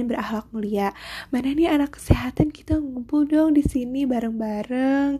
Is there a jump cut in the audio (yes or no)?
no